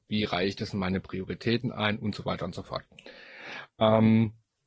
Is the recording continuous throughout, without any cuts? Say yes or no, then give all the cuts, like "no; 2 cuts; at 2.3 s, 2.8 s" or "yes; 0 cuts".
yes; 0 cuts